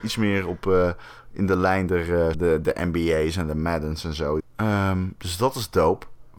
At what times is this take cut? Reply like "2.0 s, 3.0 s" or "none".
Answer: 2.3 s, 4.4 s